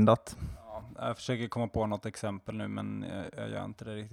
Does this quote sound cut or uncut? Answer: uncut